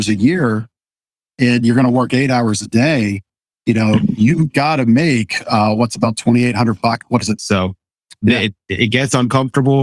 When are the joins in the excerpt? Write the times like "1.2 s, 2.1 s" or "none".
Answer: 7.4 s